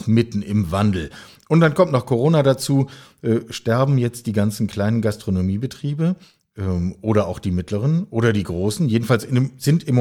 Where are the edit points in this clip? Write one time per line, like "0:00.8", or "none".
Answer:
none